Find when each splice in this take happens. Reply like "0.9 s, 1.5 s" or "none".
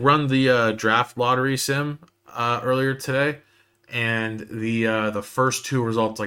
none